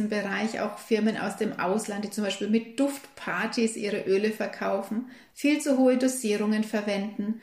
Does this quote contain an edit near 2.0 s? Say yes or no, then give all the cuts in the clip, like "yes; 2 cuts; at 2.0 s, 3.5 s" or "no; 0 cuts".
no; 0 cuts